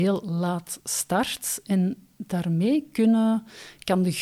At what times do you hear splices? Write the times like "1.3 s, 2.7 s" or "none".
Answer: none